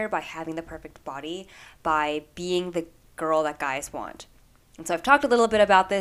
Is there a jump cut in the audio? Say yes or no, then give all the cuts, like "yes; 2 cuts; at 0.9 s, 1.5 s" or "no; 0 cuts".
no; 0 cuts